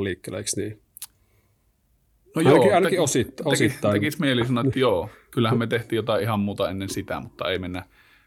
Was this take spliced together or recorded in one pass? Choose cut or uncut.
uncut